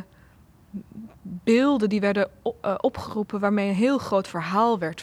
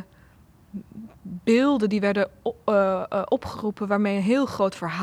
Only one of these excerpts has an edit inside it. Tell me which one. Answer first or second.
first